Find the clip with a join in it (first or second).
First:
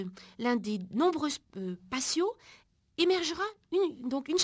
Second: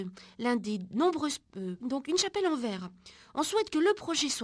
second